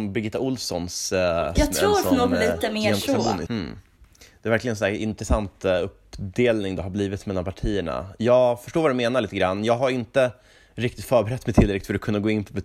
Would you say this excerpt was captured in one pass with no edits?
no; 2 cuts; at 1.6 s, 3.5 s

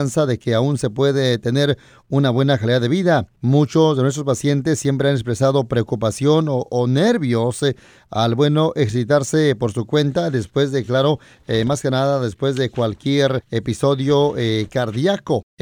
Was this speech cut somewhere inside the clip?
no; 0 cuts

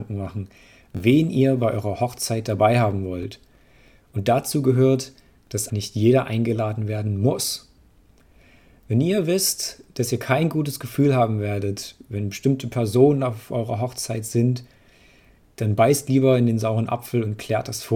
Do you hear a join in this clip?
yes; 1 cut; at 5.7 s

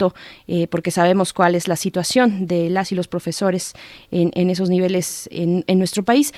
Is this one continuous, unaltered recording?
yes; 0 cuts

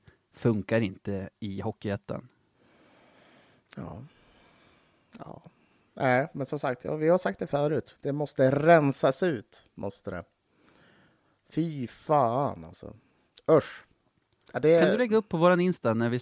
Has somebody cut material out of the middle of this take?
no; 0 cuts

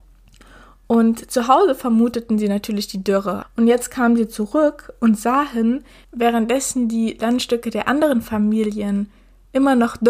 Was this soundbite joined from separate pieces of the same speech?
yes; 2 cuts; at 3.4 s, 6.0 s

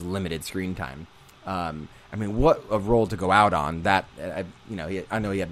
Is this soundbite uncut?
yes; 0 cuts

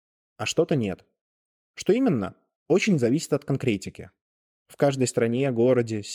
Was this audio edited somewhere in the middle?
no; 0 cuts

